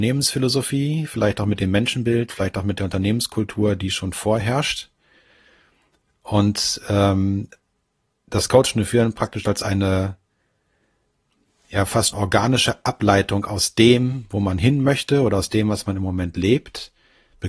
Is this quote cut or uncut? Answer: cut